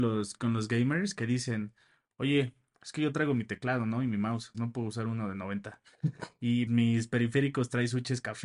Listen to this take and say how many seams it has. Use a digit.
2